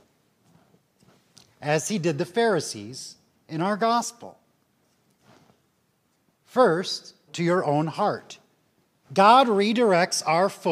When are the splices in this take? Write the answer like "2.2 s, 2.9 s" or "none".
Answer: 7.3 s, 9.0 s